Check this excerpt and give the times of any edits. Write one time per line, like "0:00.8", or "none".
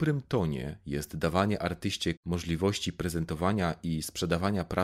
0:02.2